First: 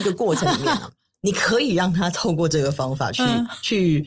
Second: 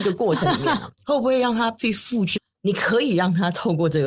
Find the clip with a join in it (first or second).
second